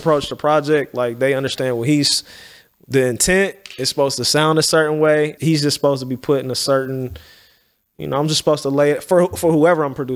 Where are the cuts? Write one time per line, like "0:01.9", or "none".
0:05.4